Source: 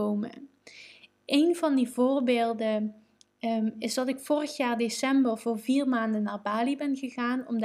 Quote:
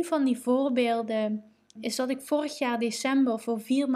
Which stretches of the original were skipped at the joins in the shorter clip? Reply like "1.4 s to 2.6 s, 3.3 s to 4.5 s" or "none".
3.3 s to 3.7 s